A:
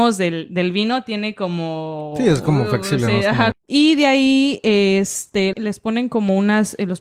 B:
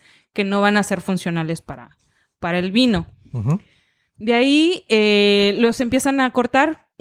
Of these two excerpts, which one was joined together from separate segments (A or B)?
A